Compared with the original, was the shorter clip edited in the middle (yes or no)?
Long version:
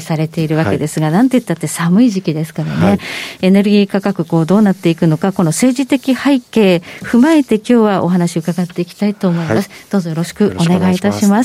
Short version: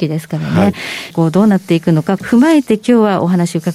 yes